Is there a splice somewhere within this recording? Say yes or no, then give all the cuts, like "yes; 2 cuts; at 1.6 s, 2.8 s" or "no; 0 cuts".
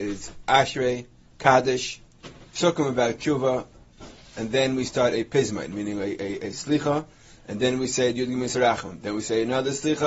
no; 0 cuts